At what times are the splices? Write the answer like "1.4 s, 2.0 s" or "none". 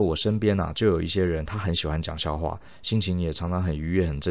none